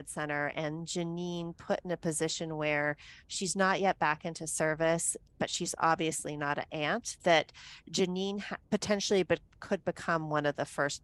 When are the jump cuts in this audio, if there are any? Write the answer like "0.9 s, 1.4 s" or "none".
5.2 s, 8.6 s